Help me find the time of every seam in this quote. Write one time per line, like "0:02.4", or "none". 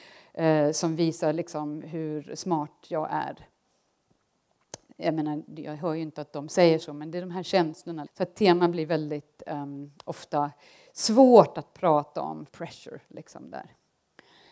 0:08.1
0:12.5